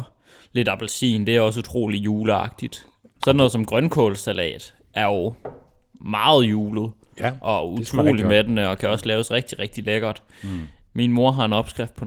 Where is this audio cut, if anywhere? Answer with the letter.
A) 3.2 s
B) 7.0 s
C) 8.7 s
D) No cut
A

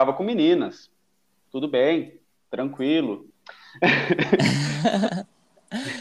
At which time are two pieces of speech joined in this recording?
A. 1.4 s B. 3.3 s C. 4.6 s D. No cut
B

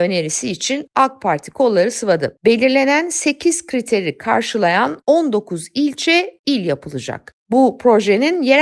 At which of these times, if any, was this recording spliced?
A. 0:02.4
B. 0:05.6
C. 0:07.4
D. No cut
D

